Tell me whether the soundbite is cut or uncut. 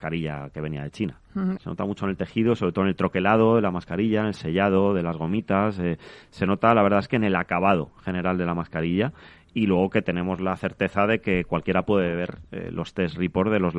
cut